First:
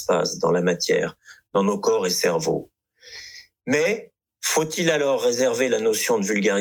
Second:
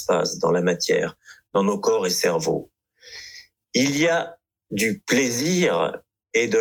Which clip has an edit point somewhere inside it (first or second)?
second